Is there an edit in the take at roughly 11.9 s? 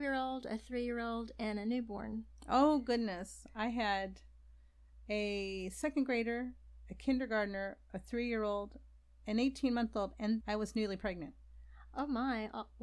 no; 1 cut; at 10.4 s

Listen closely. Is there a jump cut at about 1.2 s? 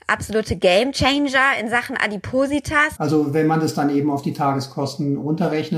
no; 1 cut; at 2.9 s

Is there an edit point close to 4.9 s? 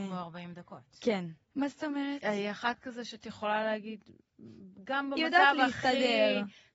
no; 1 cut; at 1.5 s

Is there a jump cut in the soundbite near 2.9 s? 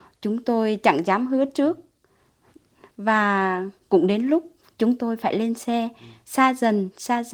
no; 0 cuts

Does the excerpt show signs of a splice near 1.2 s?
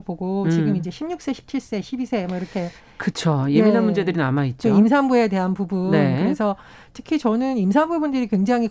no; 0 cuts

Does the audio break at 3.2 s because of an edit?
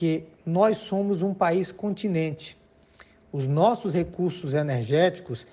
no; 0 cuts

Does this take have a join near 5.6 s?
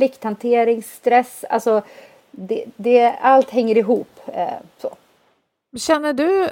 yes; 1 cut; at 5.6 s

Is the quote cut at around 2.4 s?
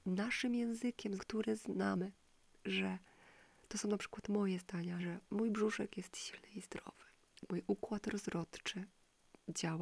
no; 2 cuts; at 1.2 s, 5.0 s

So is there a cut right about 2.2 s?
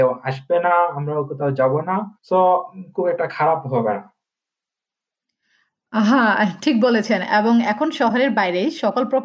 yes; 1 cut; at 2.2 s

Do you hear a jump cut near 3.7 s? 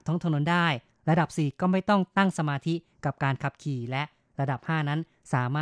no; 0 cuts

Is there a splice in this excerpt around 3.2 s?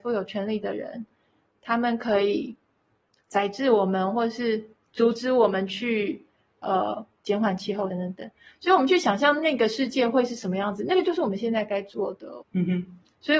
no; 2 cuts; at 7.9 s, 12.4 s

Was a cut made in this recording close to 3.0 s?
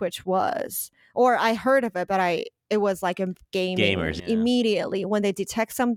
no; 1 cut; at 4.2 s

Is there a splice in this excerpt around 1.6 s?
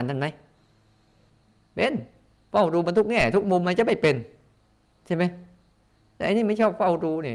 no; 1 cut; at 3.6 s

